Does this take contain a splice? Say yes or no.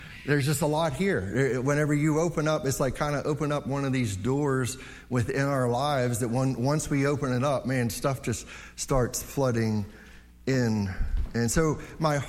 no